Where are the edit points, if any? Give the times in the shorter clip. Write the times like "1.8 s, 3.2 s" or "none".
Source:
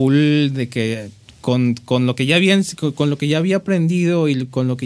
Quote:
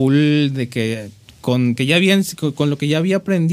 1.8 s